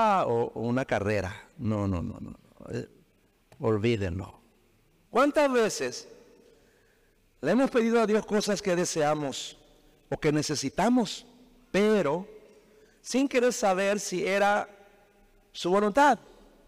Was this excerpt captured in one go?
no; 1 cut; at 5.1 s

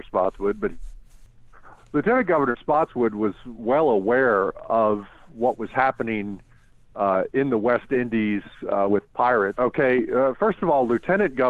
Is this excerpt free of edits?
no; 1 cut; at 9.5 s

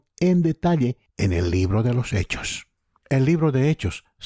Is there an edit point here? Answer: yes; 1 cut; at 3.0 s

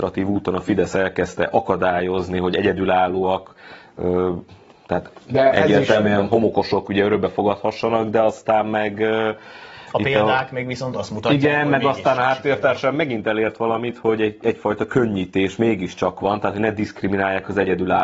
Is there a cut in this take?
no; 0 cuts

